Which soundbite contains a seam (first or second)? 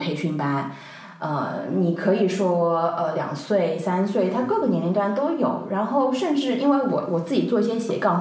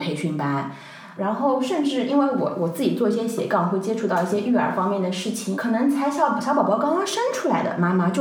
second